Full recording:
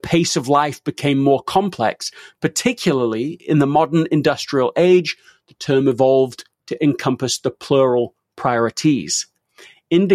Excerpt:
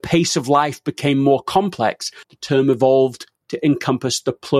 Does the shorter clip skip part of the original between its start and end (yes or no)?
yes